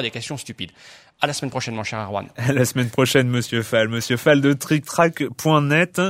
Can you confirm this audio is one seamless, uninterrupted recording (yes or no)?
yes